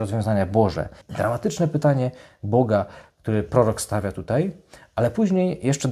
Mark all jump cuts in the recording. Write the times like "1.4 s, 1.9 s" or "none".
1.0 s